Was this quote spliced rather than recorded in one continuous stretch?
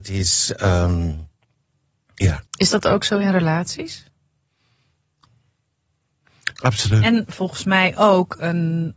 yes; 2 cuts; at 2.5 s, 6.5 s

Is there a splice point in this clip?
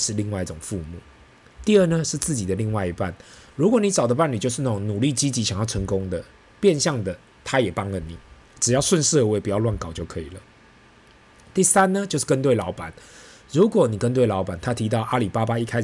yes; 1 cut; at 1.6 s

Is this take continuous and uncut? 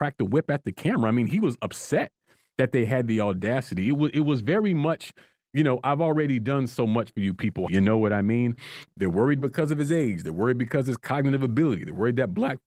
no; 2 cuts; at 7.7 s, 8.9 s

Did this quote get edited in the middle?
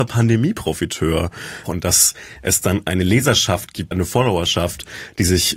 yes; 2 cuts; at 1.7 s, 3.9 s

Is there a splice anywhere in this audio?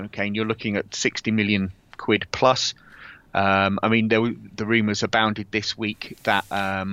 no; 0 cuts

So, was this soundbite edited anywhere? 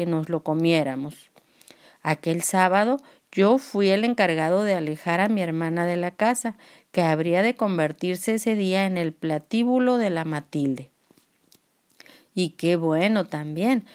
no; 0 cuts

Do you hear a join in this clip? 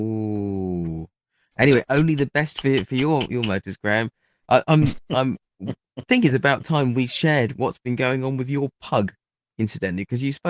no; 0 cuts

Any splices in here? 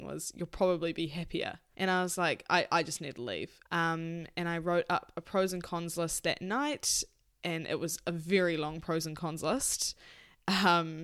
yes; 2 cuts; at 1.7 s, 3.6 s

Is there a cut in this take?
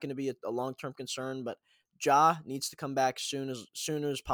no; 0 cuts

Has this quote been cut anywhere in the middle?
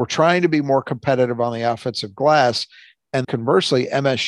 yes; 1 cut; at 3.2 s

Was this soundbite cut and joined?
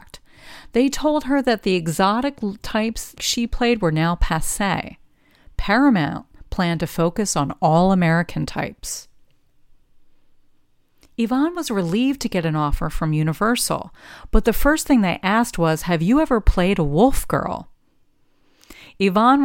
yes; 1 cut; at 3.2 s

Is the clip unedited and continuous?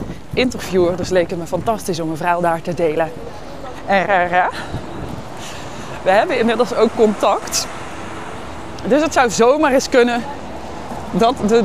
no; 1 cut; at 4.1 s

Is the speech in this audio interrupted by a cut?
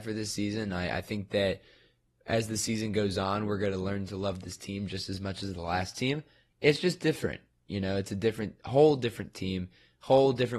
no; 0 cuts

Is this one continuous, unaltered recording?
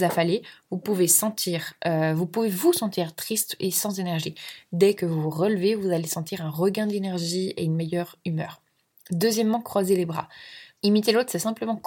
no; 1 cut; at 10.8 s

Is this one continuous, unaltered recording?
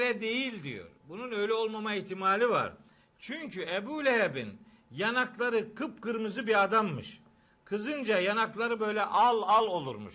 yes; 0 cuts

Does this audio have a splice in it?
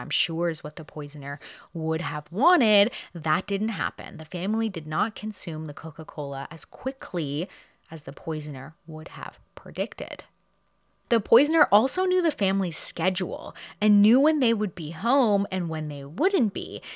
no; 0 cuts

